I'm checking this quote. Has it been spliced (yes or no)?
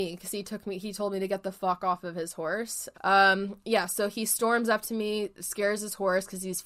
yes